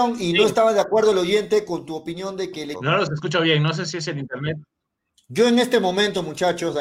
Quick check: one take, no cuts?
no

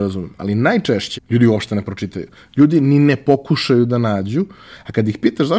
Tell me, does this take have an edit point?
yes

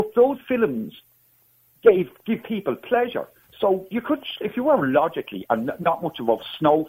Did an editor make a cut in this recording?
no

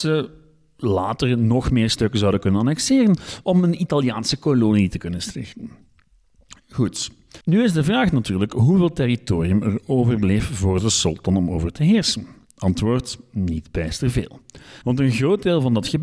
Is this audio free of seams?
no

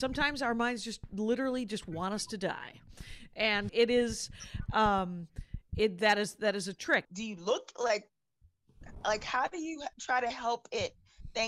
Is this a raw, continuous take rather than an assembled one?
no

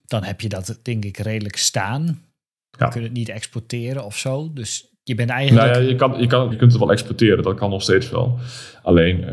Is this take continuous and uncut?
no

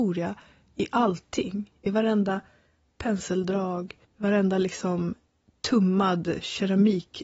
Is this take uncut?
no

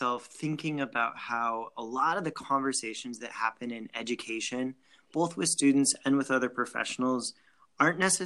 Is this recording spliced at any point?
no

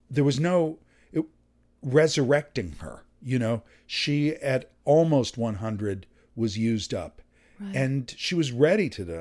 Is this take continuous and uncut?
yes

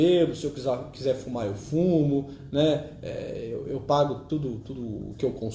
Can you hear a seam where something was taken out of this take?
yes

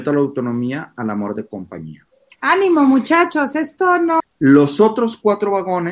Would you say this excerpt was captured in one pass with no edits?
no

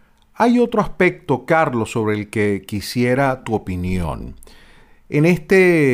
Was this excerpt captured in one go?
yes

